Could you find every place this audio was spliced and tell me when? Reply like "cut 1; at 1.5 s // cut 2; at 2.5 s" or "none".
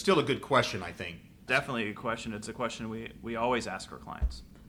cut 1; at 1.5 s